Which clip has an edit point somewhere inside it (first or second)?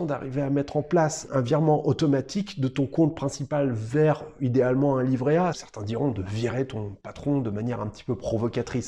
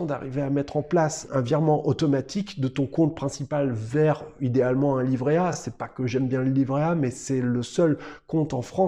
first